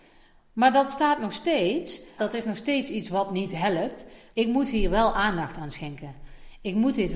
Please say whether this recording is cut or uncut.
cut